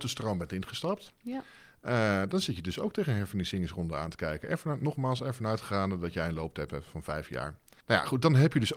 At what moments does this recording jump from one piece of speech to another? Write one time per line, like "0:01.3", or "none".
none